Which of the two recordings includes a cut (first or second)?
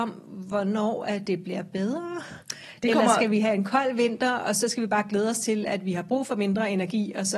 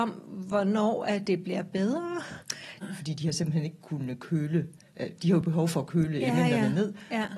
second